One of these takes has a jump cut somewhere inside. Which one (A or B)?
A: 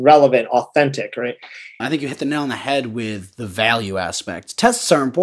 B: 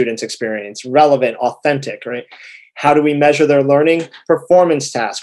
A